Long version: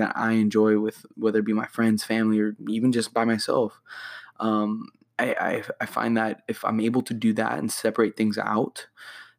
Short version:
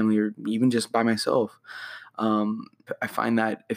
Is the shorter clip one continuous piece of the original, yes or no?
no